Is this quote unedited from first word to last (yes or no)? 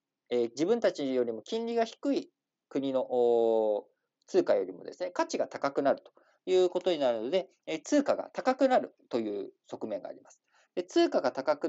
yes